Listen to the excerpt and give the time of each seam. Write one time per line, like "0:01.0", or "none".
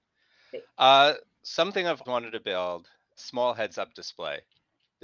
0:02.0
0:03.2